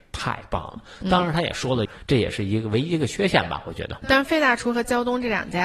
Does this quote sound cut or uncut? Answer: cut